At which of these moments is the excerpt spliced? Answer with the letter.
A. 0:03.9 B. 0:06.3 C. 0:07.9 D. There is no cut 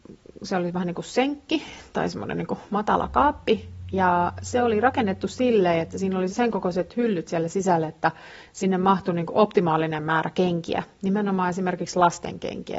B